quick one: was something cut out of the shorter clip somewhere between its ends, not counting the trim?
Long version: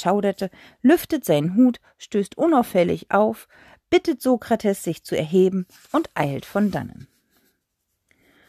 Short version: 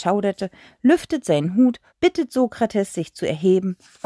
yes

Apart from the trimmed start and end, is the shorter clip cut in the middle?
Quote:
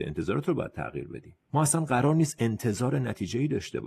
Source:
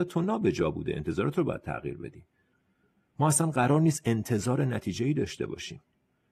yes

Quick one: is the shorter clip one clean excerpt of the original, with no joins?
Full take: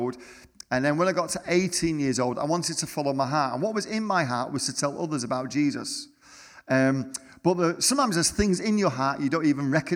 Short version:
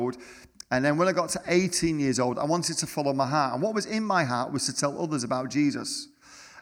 yes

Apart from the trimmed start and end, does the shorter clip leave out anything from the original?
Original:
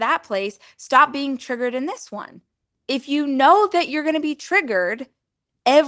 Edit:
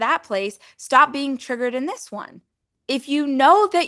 no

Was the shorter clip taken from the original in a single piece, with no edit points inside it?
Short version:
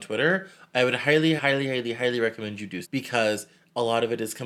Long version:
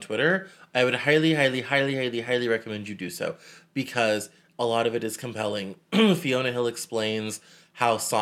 no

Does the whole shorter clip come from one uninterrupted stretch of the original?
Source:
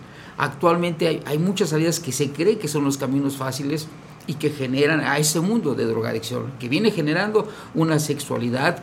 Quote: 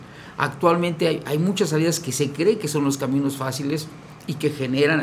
yes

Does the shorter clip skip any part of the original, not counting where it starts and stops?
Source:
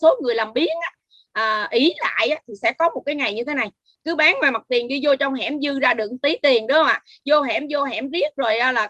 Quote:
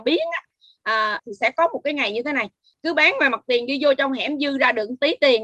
yes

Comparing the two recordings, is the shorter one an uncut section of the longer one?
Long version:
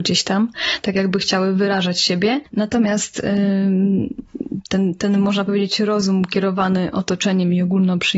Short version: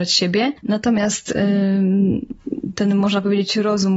no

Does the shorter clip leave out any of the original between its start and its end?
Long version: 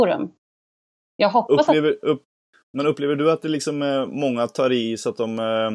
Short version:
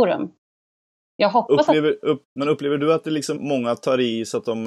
yes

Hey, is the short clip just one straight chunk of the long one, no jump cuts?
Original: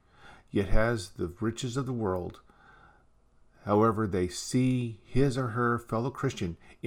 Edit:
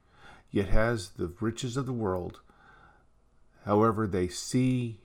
yes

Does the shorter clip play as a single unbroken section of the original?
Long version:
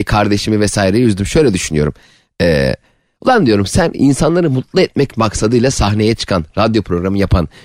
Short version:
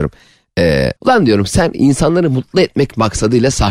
no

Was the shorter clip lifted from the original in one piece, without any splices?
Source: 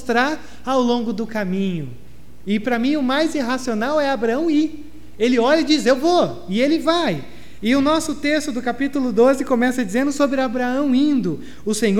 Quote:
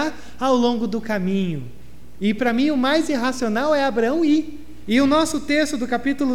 no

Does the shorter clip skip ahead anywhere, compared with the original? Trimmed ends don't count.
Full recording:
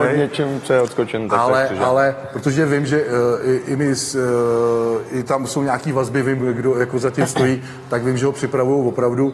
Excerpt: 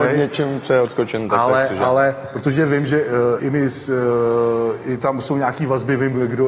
yes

